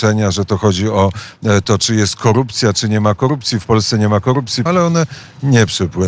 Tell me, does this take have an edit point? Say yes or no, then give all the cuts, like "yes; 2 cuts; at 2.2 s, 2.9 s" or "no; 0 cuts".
yes; 1 cut; at 4.7 s